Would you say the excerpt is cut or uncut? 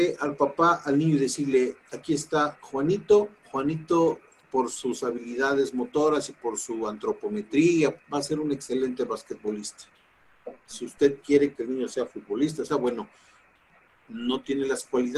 cut